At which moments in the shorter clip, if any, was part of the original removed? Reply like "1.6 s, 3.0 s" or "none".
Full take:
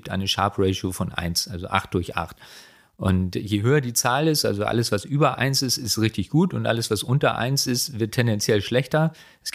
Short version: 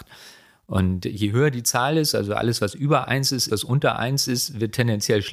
3.5 s